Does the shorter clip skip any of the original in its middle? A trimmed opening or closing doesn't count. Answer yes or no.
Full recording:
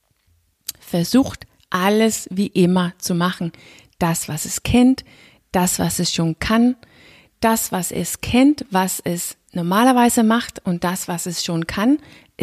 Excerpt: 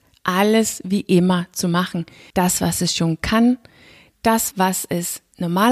yes